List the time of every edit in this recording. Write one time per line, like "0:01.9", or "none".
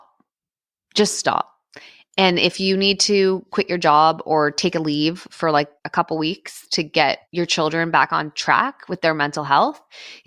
0:05.8
0:07.2